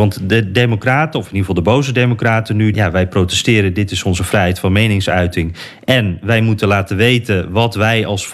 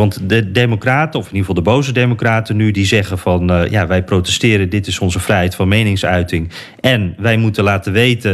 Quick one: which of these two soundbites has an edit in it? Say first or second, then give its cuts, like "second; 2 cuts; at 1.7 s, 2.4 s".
first; 1 cut; at 2.7 s